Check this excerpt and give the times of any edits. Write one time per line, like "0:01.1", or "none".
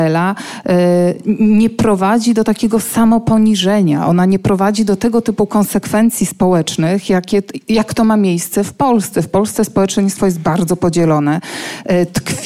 none